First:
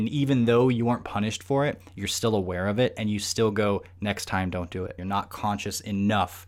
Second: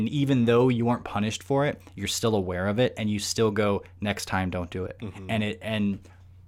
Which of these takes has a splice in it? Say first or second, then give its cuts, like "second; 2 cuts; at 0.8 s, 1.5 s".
first; 1 cut; at 5.0 s